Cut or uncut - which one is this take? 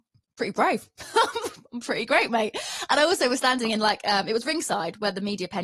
uncut